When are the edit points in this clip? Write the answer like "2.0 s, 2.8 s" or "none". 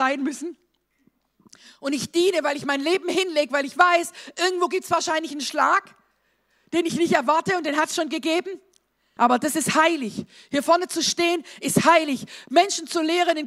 9.2 s